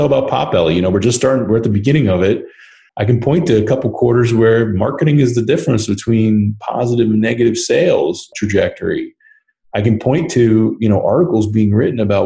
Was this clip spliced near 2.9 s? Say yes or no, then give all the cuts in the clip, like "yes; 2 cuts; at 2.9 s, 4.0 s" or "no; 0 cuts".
yes; 2 cuts; at 2.9 s, 8.3 s